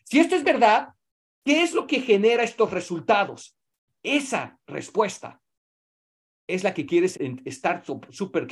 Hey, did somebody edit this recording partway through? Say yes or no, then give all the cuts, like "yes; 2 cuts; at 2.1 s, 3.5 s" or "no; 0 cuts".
yes; 1 cut; at 7.1 s